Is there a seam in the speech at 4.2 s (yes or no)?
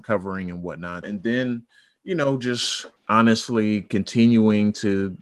no